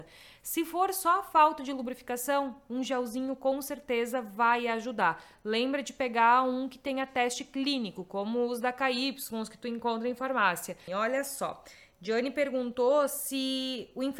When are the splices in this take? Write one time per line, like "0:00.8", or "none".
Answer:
0:10.9